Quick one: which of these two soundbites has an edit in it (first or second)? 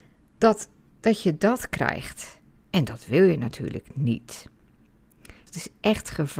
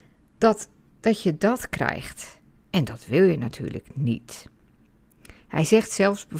first